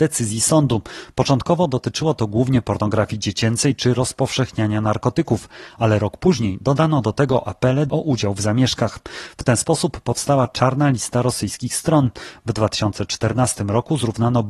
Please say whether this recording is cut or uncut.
uncut